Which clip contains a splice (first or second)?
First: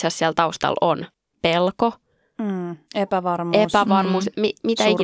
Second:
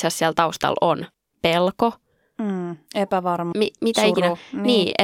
second